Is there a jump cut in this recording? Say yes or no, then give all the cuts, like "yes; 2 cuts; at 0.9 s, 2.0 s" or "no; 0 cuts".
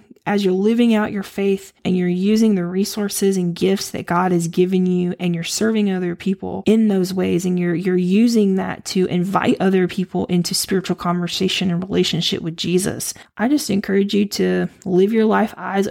yes; 1 cut; at 13.2 s